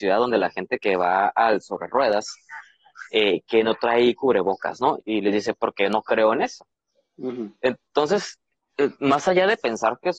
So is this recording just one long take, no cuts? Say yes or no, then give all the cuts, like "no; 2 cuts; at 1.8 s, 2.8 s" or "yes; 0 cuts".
no; 1 cut; at 5.0 s